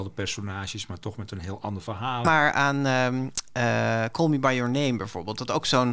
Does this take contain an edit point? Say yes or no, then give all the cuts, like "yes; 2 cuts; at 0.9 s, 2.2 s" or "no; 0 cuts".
yes; 1 cut; at 2.2 s